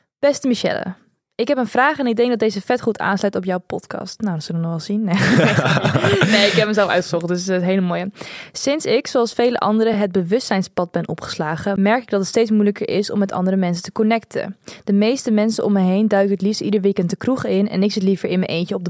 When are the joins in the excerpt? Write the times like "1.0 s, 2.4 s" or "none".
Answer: none